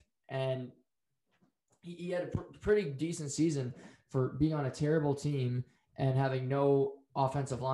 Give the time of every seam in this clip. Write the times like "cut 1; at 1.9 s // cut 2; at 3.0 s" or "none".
none